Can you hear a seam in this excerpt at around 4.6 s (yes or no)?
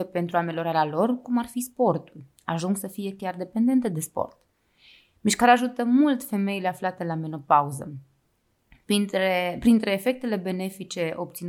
no